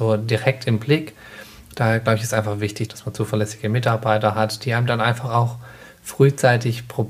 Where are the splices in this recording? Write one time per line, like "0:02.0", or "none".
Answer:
0:02.9